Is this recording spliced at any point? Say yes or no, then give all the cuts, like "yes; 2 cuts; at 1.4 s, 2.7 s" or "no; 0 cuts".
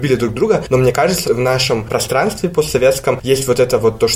yes; 1 cut; at 1.2 s